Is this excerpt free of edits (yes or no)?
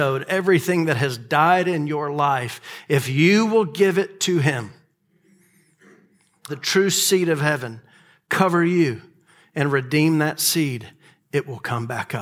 no